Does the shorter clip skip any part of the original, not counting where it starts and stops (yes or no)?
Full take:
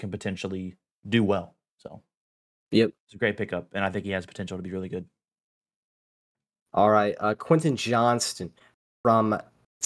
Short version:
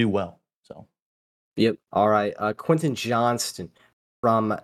yes